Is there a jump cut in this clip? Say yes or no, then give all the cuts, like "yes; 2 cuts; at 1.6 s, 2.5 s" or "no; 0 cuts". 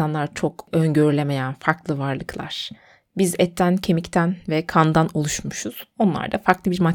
no; 0 cuts